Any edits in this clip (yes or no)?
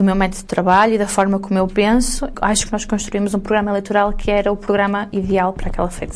yes